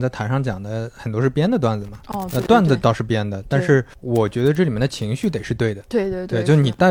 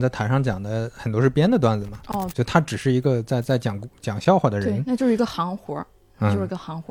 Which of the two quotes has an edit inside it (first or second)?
second